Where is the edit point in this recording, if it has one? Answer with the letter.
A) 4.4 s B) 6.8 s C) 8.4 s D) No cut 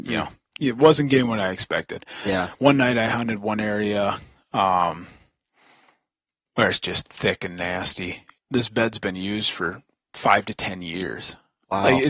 C